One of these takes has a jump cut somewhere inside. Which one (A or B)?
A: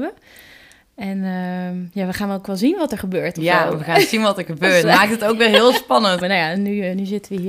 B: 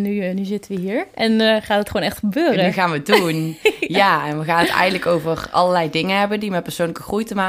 A